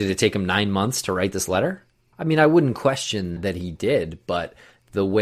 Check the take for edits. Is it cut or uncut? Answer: cut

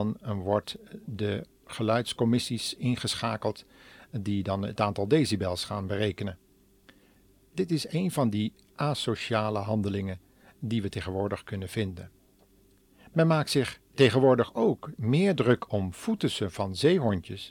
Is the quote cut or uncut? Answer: uncut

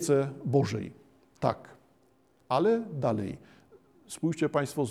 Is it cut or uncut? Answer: uncut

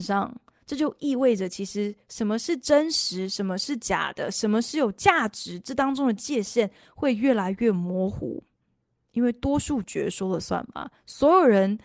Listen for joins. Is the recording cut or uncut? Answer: uncut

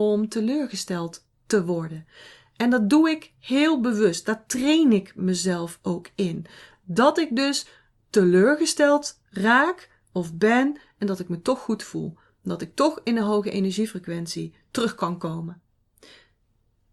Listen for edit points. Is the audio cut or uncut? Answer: uncut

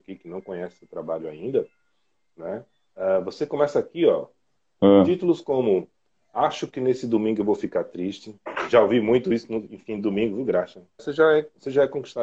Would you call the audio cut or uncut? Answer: cut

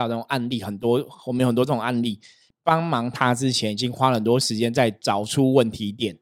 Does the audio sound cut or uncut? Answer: cut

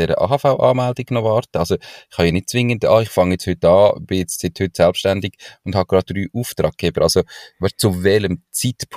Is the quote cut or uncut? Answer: cut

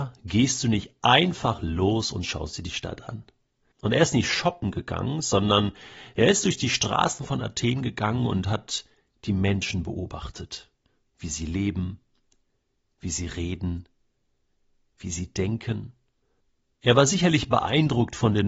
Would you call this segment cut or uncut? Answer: cut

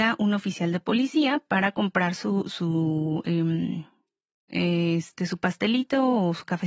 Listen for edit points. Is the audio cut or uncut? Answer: uncut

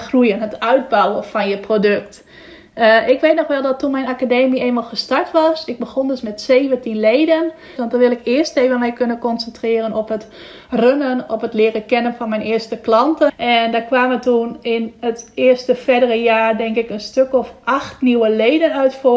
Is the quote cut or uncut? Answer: cut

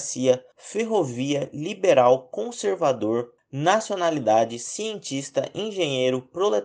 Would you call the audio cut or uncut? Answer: uncut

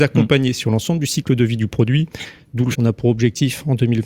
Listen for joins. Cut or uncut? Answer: cut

